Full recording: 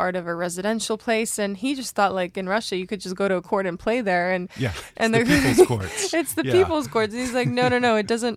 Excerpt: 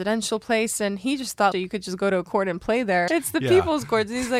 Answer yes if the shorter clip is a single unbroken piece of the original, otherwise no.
no